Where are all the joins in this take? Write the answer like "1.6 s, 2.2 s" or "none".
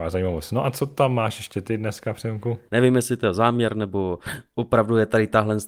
2.7 s